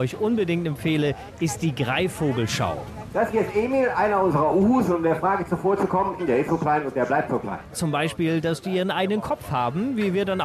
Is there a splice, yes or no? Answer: yes